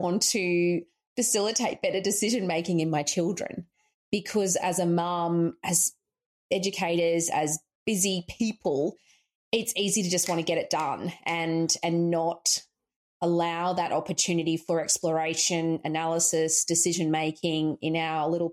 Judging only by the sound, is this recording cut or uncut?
uncut